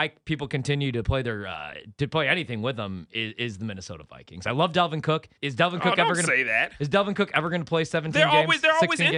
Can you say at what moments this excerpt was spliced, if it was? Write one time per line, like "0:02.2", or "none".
0:05.4